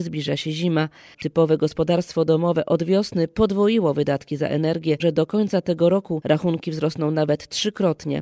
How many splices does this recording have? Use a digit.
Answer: 2